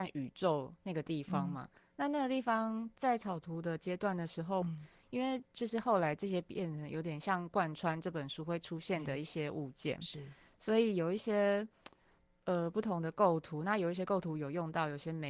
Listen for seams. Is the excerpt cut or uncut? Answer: cut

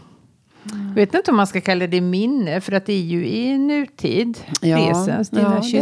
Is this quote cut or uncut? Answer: uncut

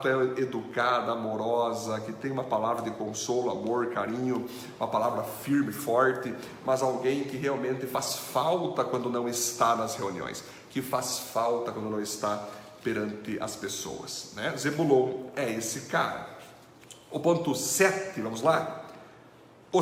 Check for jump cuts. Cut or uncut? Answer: uncut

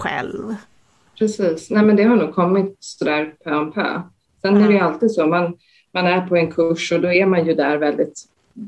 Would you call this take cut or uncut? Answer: uncut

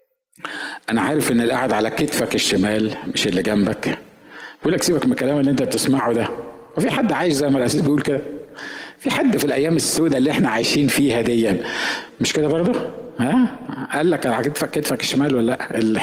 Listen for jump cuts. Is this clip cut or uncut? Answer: uncut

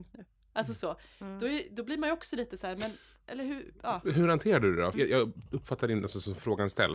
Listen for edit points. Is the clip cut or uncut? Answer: cut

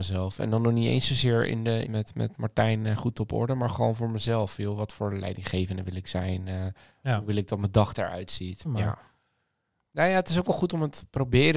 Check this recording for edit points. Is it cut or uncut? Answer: cut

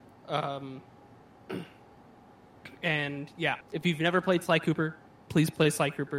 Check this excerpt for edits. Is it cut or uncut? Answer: cut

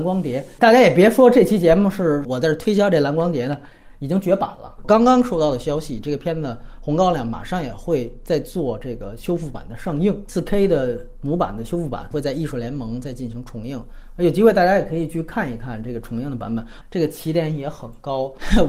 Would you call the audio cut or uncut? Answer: cut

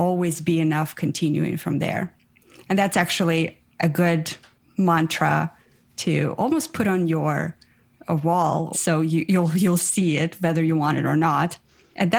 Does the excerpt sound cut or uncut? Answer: cut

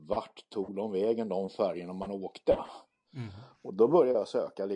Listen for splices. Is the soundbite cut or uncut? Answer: uncut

